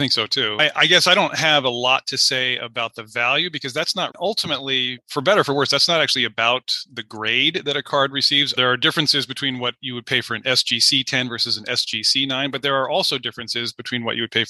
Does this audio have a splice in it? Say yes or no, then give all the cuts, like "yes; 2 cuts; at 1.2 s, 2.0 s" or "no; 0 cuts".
yes; 2 cuts; at 4.1 s, 8.6 s